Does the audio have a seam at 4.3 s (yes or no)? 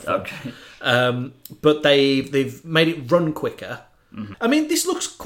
yes